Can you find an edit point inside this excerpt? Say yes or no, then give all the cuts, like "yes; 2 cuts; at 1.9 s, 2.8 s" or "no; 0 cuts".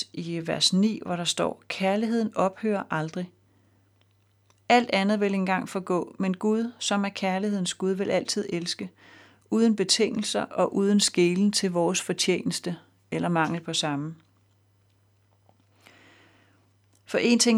no; 0 cuts